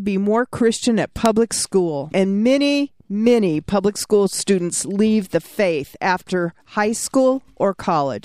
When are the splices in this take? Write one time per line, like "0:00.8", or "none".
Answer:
0:02.1